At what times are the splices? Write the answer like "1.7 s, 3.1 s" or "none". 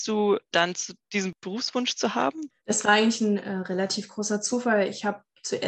1.0 s, 2.6 s